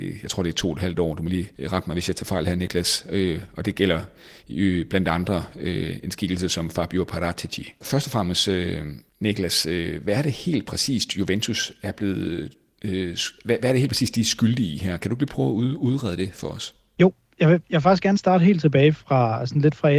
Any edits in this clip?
yes; 2 cuts; at 1.6 s, 6.0 s

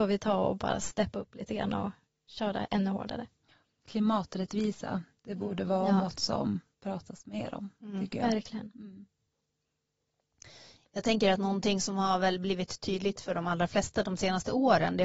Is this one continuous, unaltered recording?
yes; 0 cuts

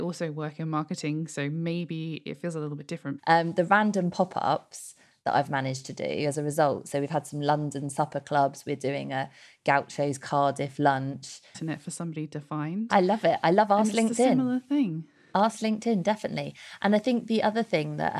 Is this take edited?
yes; 2 cuts; at 3.2 s, 11.5 s

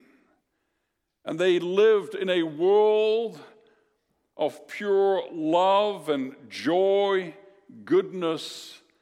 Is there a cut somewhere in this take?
no; 0 cuts

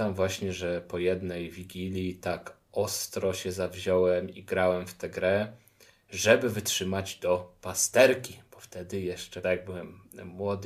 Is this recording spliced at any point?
yes; 1 cut; at 9.4 s

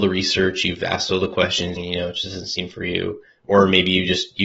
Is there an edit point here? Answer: yes; 1 cut; at 1.8 s

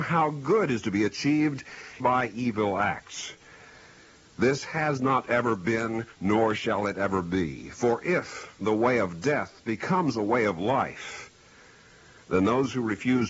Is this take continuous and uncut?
no; 1 cut; at 2.0 s

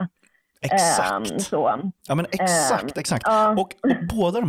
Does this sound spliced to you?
yes; 1 cut; at 2.0 s

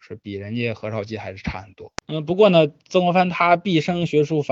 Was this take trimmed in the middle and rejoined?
no; 0 cuts

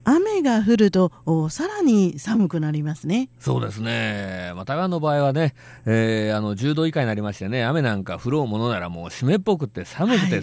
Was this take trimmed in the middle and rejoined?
no; 0 cuts

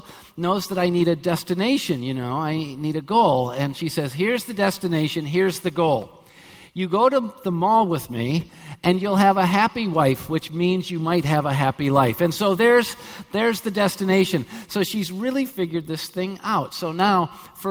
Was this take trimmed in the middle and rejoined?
no; 0 cuts

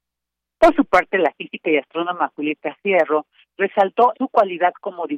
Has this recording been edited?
yes; 1 cut; at 4.1 s

